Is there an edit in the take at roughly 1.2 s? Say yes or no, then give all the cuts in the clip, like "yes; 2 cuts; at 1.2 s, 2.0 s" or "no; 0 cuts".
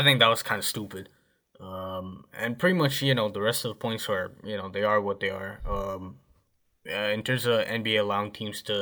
no; 0 cuts